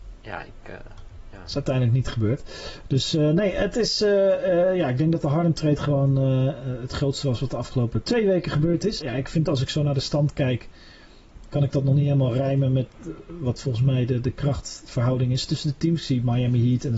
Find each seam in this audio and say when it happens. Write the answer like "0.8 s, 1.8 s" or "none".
9.0 s